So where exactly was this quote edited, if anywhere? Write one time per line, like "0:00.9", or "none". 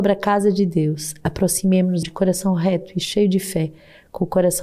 0:02.0